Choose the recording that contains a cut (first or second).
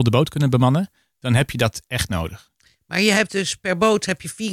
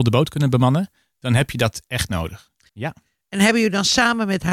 second